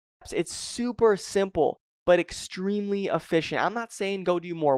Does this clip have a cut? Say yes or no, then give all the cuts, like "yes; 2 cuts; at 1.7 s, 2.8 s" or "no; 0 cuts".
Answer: no; 0 cuts